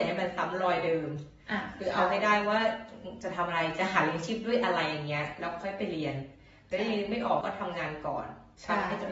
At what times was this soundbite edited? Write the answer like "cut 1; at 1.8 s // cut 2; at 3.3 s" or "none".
cut 1; at 7.4 s